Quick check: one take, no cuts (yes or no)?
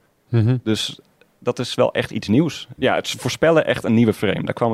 no